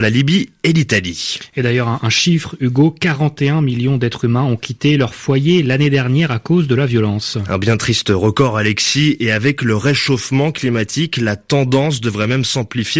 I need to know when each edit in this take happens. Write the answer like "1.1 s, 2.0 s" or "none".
none